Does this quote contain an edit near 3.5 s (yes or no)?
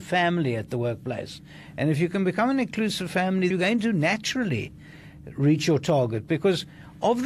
yes